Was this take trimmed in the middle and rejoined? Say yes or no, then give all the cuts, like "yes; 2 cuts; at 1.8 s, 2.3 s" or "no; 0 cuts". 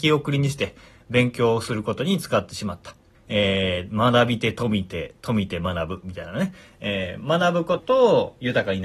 yes; 2 cuts; at 3.1 s, 7.8 s